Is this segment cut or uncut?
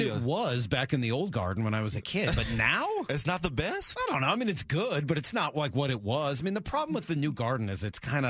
uncut